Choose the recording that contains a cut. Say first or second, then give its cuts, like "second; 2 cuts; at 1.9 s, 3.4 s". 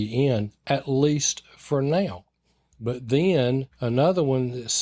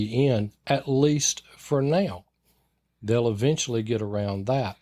first; 1 cut; at 2.7 s